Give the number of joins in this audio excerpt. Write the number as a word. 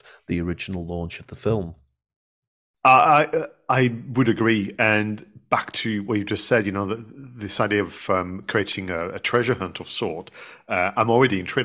zero